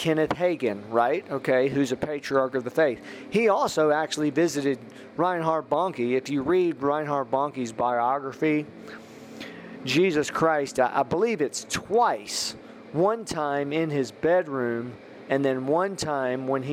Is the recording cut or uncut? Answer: uncut